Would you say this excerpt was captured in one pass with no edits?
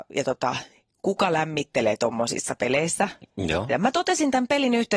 no; 1 cut; at 3.7 s

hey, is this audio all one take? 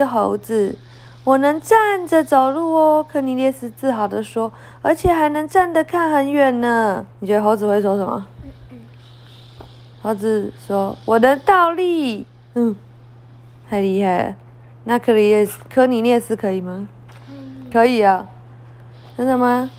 no; 1 cut; at 7.1 s

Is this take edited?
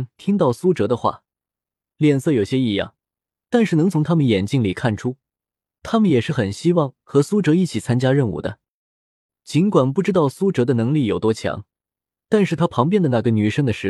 no; 0 cuts

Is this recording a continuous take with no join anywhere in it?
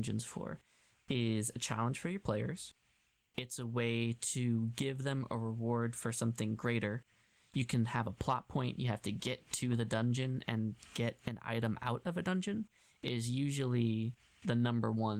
yes; 0 cuts

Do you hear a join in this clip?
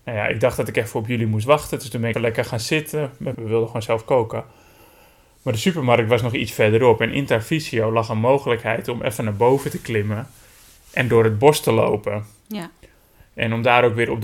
yes; 2 cuts; at 2.1 s, 3.3 s

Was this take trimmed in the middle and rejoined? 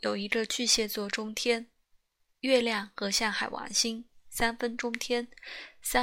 no; 0 cuts

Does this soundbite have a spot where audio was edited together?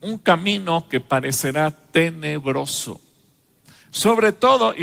no; 0 cuts

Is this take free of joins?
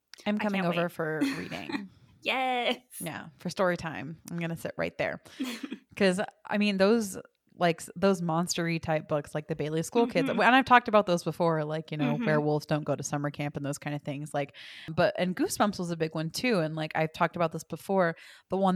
yes; 0 cuts

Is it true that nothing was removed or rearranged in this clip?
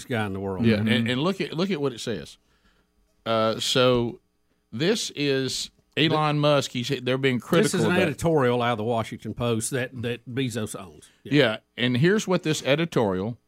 yes; 0 cuts

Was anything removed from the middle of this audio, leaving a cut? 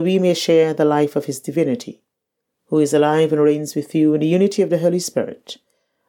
no; 0 cuts

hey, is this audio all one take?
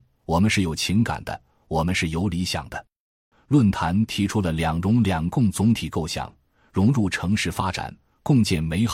no; 1 cut; at 3.3 s

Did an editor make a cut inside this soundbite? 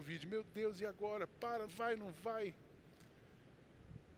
yes; 1 cut; at 1.7 s

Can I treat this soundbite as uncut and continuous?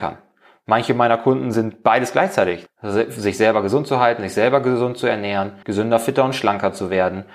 no; 2 cuts; at 2.7 s, 5.6 s

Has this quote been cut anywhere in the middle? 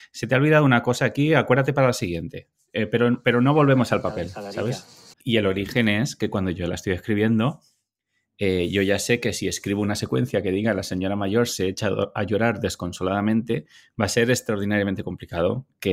yes; 1 cut; at 5.1 s

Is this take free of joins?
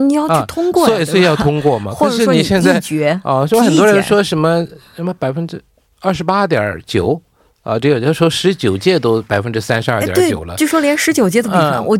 yes; 0 cuts

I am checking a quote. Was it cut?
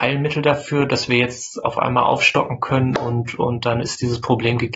no; 0 cuts

